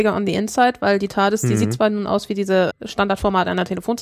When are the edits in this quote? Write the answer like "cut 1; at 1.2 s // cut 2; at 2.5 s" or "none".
cut 1; at 2.7 s